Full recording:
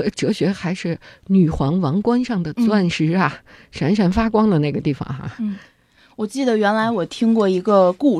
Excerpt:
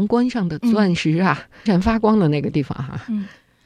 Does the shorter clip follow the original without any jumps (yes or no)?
no